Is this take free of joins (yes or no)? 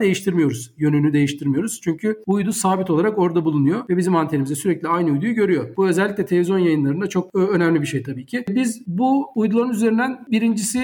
yes